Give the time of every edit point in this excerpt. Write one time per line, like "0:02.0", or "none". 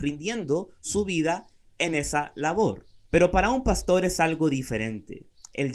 0:03.1